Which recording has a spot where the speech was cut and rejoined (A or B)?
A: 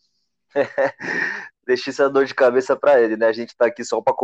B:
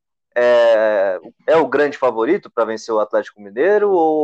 B